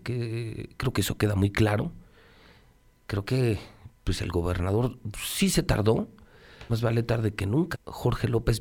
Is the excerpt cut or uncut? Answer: cut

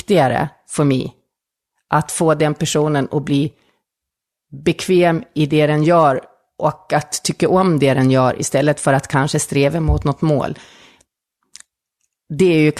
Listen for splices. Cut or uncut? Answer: uncut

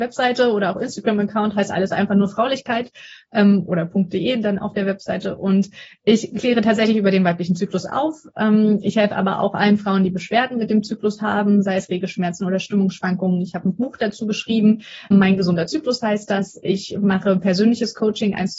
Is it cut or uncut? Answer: cut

